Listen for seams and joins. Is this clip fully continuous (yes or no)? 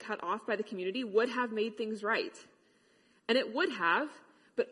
yes